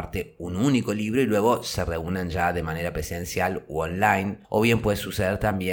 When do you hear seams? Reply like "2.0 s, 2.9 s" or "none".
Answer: none